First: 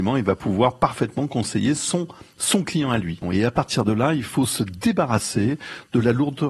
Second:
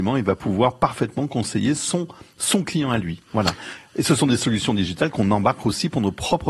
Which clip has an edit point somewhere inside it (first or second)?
first